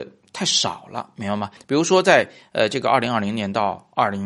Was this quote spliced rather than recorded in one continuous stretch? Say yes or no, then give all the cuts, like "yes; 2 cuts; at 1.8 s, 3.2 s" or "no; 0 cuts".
yes; 1 cut; at 1.6 s